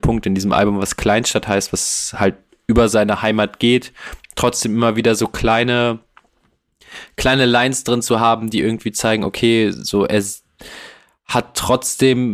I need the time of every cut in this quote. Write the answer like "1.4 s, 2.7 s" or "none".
none